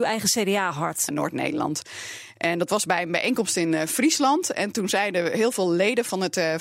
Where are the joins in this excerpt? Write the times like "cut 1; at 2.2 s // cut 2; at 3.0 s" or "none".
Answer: cut 1; at 1.1 s